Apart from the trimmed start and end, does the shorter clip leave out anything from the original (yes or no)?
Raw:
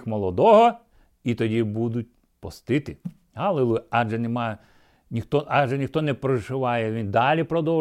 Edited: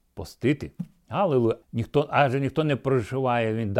yes